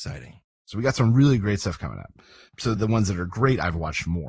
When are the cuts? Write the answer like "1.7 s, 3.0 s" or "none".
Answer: 2.8 s